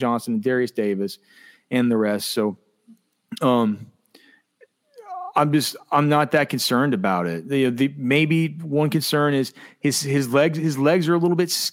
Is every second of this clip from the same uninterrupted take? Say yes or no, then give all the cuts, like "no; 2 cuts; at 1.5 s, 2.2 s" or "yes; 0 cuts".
yes; 0 cuts